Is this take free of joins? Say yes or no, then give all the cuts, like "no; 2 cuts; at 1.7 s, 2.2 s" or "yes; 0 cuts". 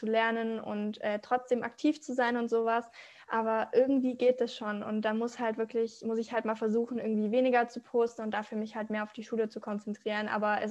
yes; 0 cuts